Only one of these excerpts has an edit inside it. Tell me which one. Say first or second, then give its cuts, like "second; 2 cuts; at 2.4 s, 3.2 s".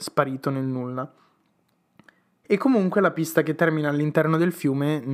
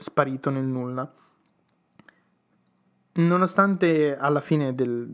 first; 1 cut; at 2.4 s